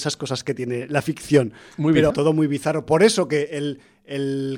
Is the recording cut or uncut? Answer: cut